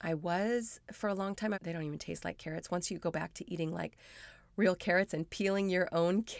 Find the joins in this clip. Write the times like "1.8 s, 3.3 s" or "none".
1.5 s